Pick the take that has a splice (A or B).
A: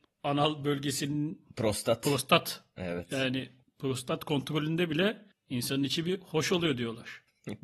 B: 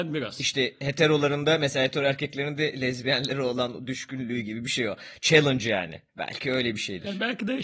B